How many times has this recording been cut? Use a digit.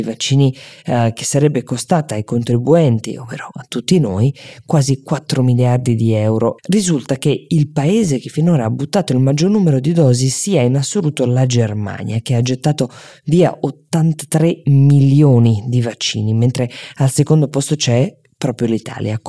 1